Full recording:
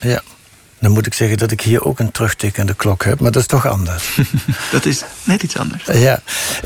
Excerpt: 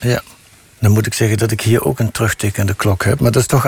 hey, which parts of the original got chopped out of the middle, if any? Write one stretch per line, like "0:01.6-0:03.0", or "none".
none